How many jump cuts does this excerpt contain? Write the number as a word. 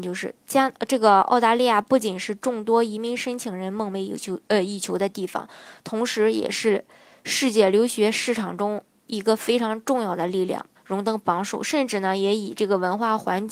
one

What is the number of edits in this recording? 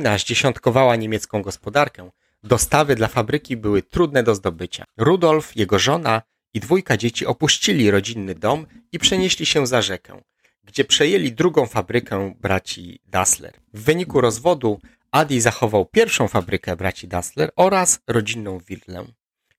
one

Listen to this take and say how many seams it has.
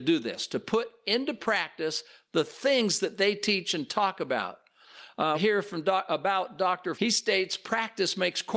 two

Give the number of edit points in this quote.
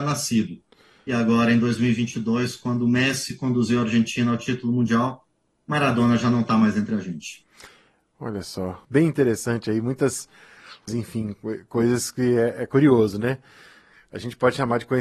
two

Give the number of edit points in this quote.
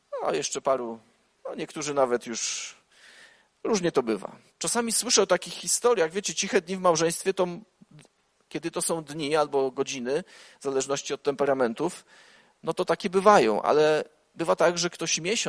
one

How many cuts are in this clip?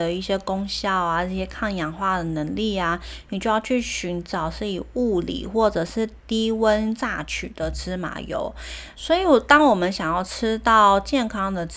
one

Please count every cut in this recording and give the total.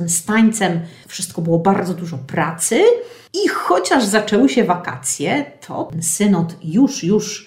zero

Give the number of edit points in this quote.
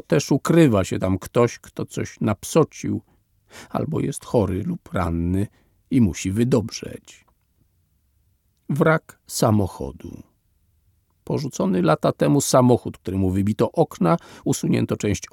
zero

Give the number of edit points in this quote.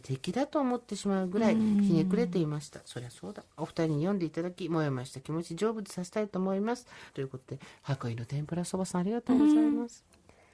two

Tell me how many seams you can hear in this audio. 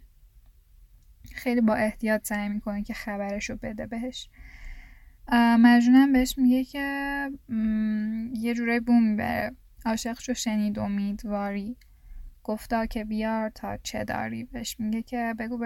one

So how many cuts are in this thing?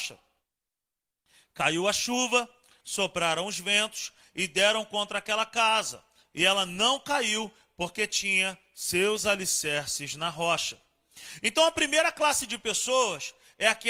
one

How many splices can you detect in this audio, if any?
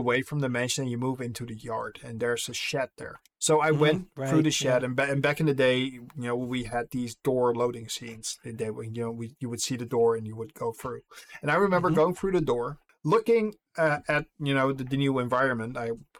zero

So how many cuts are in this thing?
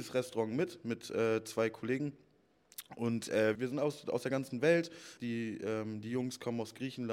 two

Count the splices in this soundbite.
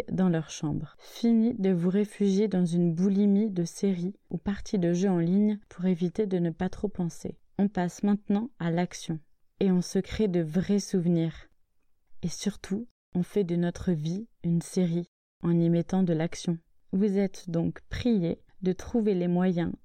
zero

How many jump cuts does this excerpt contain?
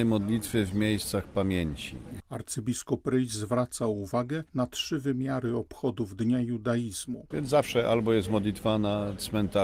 two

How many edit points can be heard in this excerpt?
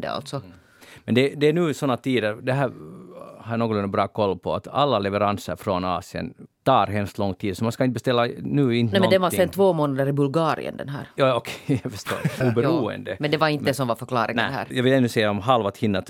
three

